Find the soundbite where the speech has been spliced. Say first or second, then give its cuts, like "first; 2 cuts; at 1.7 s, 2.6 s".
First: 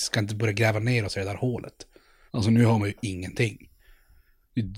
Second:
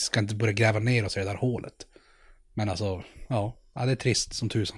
first; 1 cut; at 2.3 s